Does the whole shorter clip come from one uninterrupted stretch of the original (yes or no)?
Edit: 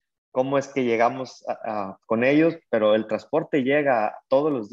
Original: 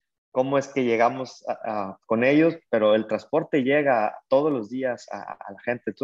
yes